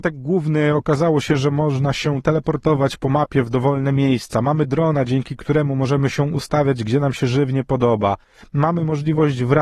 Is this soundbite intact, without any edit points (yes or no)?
yes